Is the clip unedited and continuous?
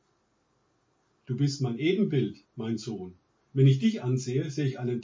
no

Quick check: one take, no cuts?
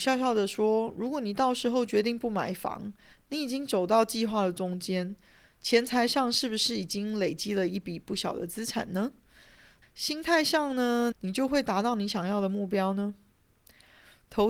no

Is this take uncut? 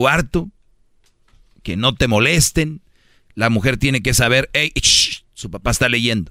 yes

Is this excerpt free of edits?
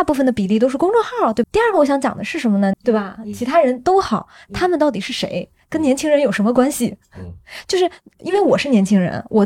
no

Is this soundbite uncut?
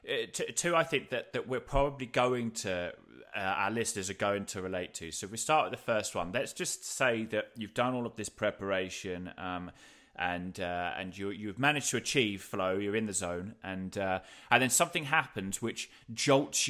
yes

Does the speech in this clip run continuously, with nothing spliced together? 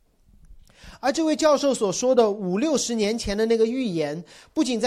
yes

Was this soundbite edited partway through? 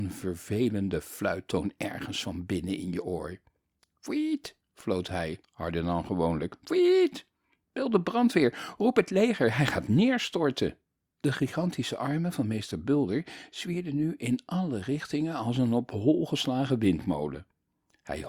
no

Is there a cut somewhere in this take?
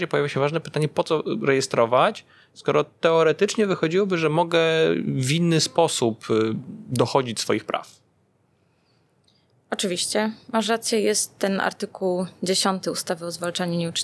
no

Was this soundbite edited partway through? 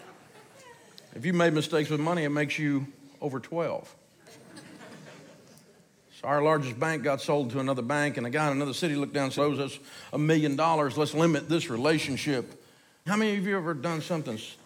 yes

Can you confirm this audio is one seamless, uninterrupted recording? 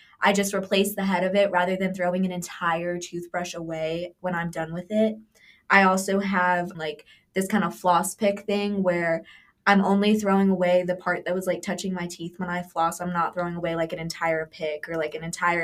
yes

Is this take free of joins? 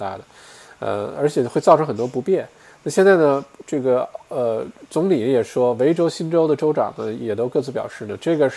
yes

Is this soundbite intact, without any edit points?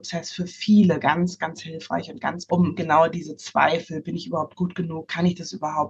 no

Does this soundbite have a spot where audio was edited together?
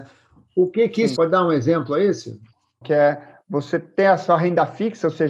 yes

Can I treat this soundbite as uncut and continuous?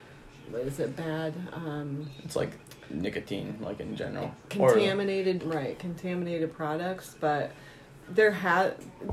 no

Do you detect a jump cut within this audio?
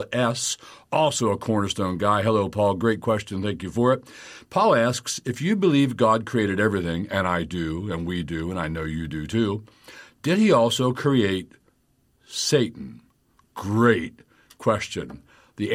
no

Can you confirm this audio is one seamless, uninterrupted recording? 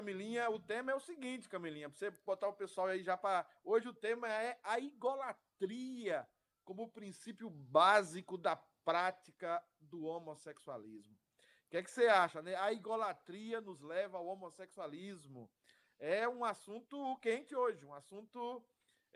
yes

